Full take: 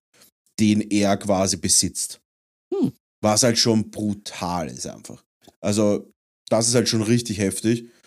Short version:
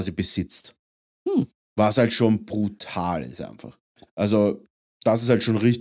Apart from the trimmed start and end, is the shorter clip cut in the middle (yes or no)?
no